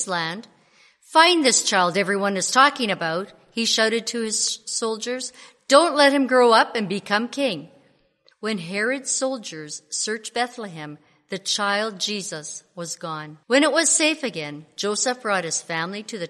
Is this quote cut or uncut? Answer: cut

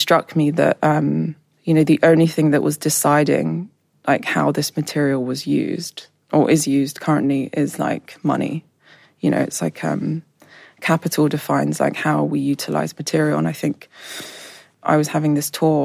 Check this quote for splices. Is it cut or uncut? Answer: uncut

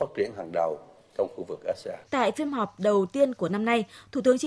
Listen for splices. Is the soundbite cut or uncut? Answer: cut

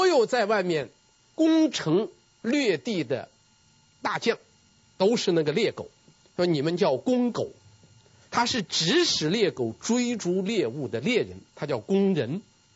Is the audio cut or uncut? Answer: cut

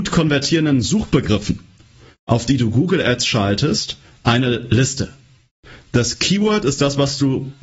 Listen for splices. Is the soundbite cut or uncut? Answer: cut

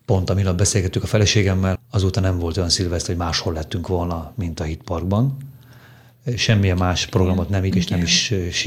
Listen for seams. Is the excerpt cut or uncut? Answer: cut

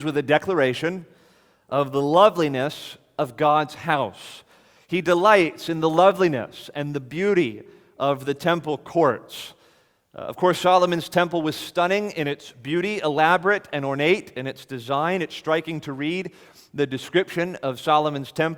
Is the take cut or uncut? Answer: uncut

